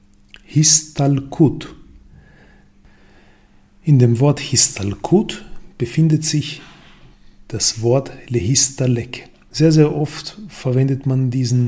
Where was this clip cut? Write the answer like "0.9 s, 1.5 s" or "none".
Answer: 9.5 s